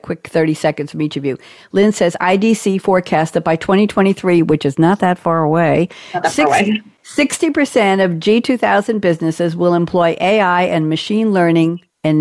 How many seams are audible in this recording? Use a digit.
0